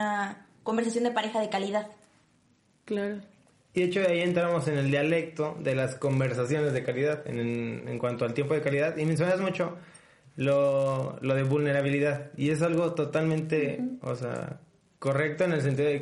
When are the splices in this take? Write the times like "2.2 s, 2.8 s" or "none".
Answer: none